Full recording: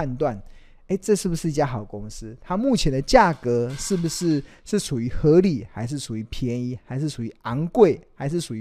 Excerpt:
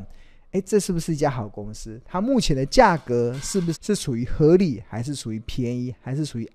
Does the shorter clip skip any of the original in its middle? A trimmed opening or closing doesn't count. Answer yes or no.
yes